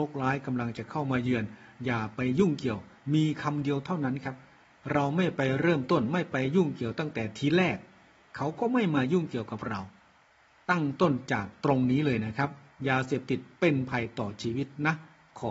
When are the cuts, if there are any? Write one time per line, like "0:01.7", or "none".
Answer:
none